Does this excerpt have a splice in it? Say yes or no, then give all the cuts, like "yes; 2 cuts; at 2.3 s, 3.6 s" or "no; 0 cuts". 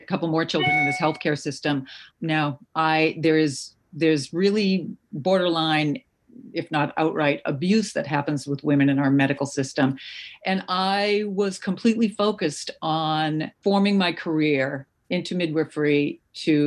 yes; 2 cuts; at 2.1 s, 13.5 s